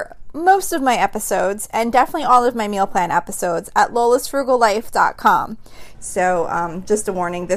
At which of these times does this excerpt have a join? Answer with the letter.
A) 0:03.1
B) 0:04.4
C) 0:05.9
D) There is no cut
C